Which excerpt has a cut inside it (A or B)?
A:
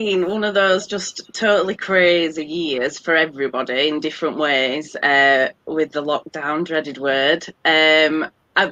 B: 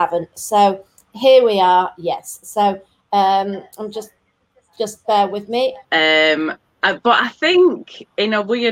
B